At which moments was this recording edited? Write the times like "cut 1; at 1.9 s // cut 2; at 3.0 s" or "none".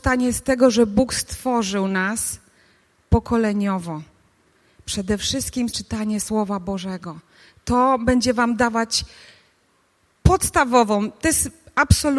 cut 1; at 5.7 s